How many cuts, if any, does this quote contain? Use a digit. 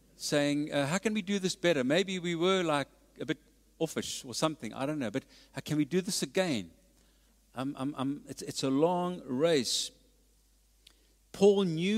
0